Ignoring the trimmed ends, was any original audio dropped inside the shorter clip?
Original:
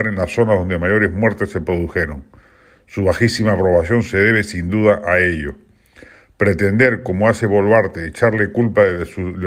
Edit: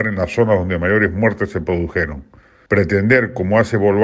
yes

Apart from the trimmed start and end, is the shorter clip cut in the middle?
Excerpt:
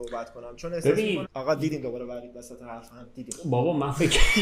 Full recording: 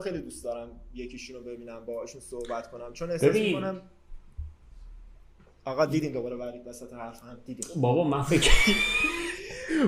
yes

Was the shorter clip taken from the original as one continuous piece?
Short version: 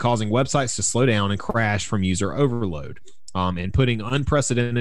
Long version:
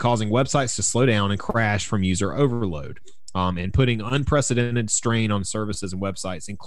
yes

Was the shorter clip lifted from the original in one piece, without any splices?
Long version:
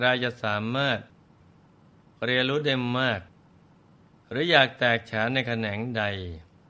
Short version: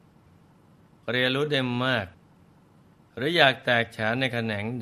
yes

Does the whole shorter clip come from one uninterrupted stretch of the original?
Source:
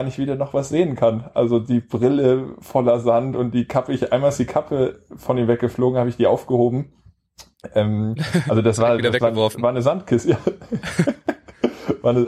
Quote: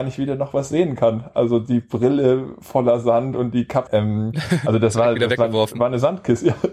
no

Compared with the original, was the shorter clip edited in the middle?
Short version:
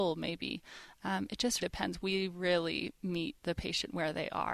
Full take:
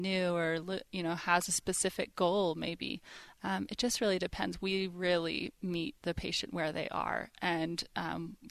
yes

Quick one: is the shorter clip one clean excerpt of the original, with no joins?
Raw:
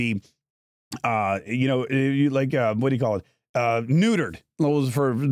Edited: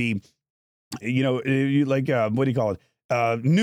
no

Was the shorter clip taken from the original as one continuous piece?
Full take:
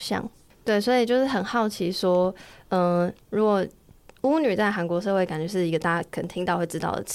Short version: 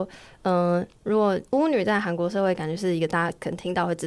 no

